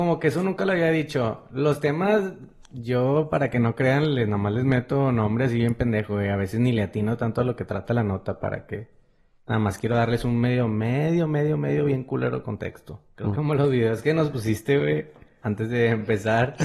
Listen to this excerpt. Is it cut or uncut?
cut